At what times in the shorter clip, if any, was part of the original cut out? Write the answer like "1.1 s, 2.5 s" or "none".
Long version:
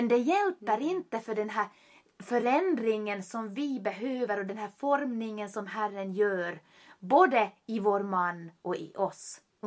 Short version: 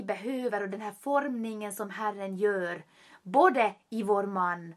none

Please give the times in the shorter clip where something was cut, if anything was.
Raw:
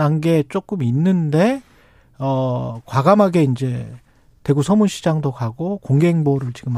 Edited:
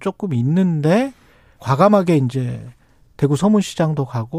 1.6 s

